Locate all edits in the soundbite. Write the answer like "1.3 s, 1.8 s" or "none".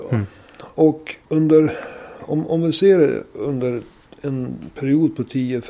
1.2 s